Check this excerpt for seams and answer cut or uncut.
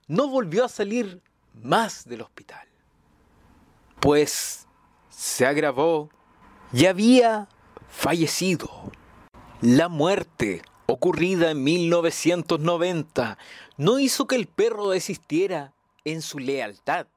uncut